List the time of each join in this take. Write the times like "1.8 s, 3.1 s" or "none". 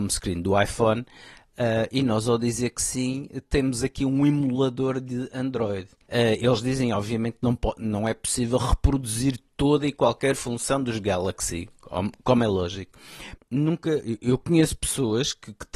6.1 s, 13.4 s